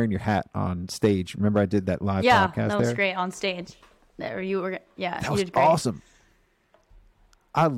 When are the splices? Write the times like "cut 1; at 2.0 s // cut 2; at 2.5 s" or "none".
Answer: none